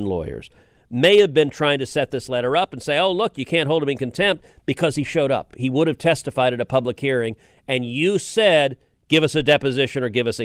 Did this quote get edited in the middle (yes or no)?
no